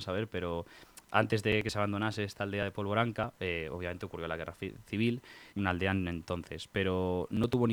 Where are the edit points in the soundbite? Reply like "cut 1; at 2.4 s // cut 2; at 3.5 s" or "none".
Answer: cut 1; at 5.5 s